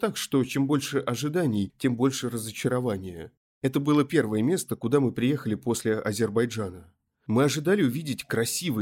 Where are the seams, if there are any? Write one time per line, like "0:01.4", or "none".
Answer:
0:03.5